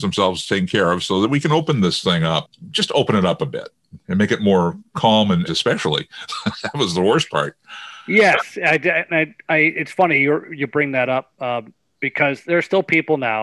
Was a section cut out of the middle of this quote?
yes; 1 cut; at 5.5 s

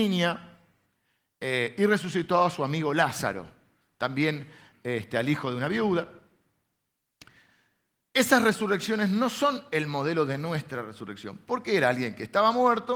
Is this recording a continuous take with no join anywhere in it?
yes; 0 cuts

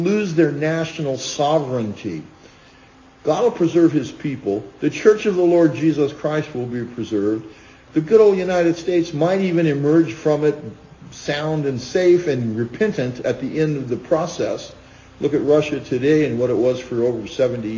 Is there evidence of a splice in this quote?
no; 0 cuts

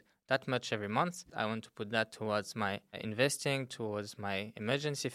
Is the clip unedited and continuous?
no; 1 cut; at 1.3 s

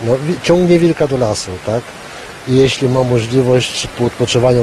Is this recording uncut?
yes; 0 cuts

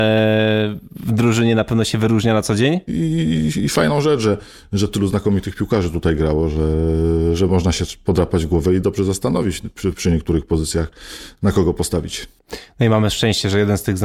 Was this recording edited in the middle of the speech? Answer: yes; 1 cut; at 2.9 s

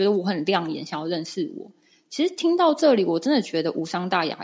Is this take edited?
no; 0 cuts

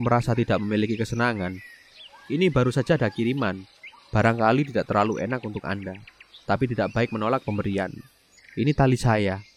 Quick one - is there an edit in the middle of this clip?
yes; 2 cuts; at 2.1 s, 8.4 s

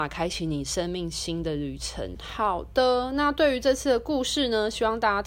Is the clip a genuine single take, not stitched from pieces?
no; 1 cut; at 2.1 s

